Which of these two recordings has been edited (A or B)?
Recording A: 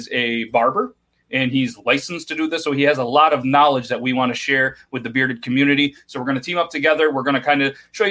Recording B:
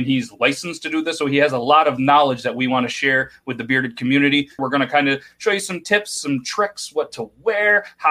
B